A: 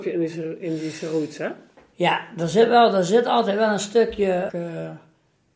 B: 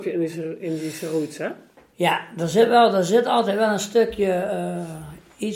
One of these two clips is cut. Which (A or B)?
A